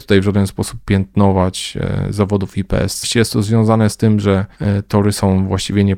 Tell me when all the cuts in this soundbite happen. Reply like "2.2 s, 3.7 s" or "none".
3.0 s